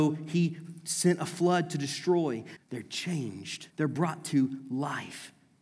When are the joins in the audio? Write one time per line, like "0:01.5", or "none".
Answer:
0:02.6
0:03.7